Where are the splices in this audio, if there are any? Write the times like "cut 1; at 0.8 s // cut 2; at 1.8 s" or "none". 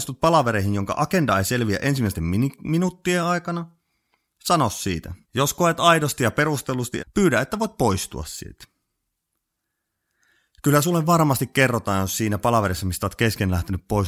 cut 1; at 5.2 s // cut 2; at 7.0 s